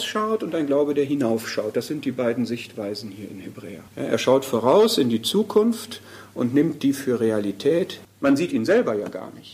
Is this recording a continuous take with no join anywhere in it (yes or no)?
no